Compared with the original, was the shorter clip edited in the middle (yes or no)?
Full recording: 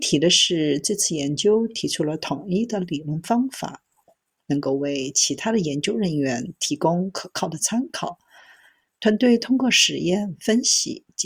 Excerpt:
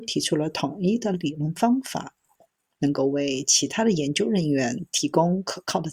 no